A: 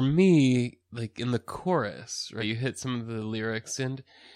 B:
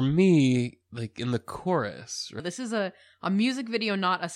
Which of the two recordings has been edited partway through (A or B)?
B